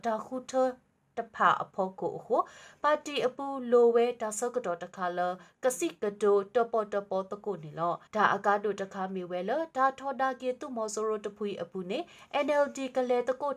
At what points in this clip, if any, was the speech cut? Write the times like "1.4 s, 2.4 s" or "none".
8.1 s